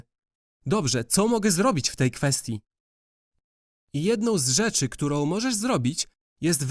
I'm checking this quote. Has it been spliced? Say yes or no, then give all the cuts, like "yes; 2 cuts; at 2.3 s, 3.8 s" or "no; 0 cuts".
no; 0 cuts